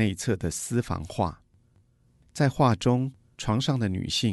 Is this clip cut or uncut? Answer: uncut